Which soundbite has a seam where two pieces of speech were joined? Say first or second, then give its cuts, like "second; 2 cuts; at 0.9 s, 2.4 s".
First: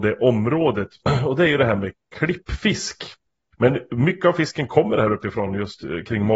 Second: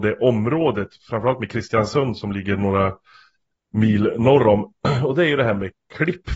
first; 2 cuts; at 1.0 s, 3.5 s